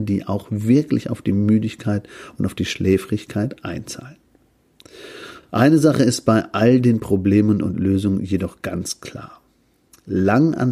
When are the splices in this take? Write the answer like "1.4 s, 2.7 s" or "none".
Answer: none